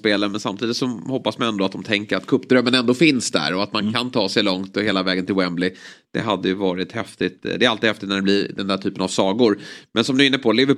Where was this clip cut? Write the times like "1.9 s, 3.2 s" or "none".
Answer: none